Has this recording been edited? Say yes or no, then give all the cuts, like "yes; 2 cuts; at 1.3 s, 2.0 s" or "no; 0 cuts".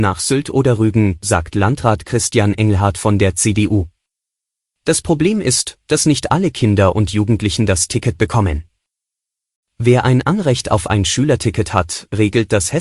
no; 0 cuts